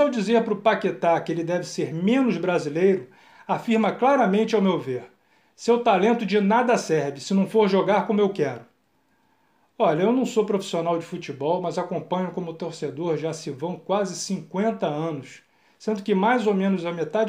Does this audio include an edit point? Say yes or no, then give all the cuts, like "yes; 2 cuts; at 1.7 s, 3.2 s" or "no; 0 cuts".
no; 0 cuts